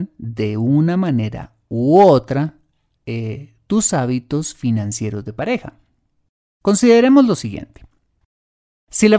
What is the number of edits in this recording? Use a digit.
0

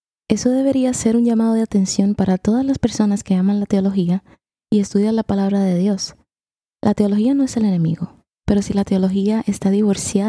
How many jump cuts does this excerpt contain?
1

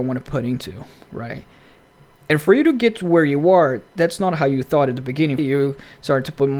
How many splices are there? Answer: 1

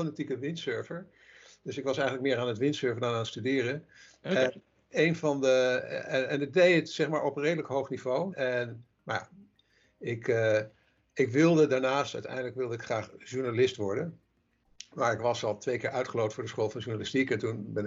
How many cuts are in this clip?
1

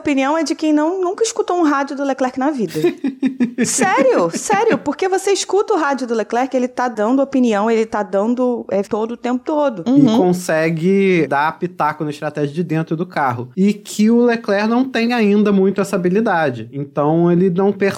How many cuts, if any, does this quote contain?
2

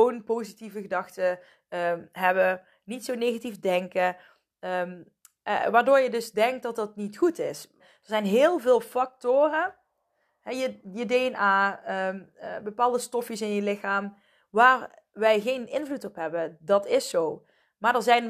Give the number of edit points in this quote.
1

